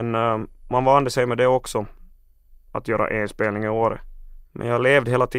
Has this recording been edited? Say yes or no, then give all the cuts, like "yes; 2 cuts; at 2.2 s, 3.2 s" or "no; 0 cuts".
no; 0 cuts